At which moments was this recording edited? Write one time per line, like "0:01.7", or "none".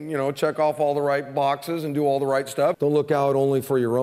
0:02.7

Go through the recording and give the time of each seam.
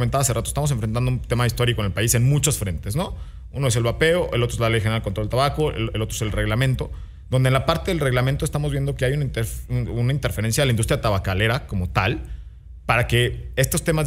none

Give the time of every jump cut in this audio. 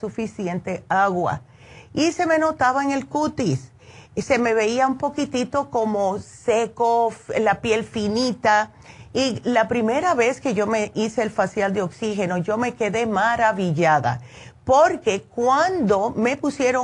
none

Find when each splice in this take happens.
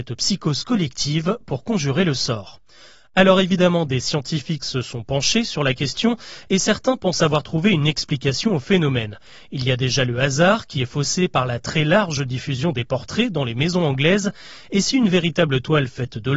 none

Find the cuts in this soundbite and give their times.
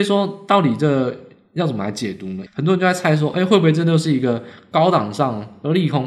0:02.5

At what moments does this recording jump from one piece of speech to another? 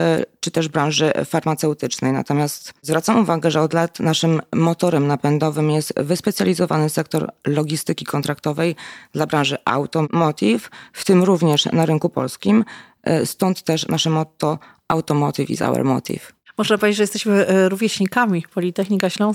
none

